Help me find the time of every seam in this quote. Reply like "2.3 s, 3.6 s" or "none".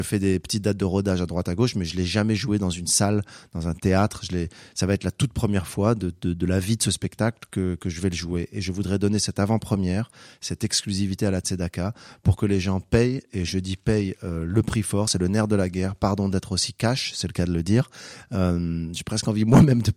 none